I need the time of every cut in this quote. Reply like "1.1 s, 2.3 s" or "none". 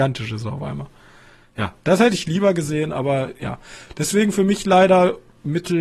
none